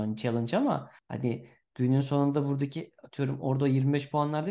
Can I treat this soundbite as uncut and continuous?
no; 1 cut; at 1.0 s

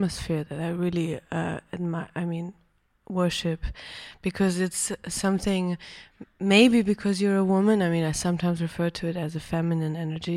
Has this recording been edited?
no; 0 cuts

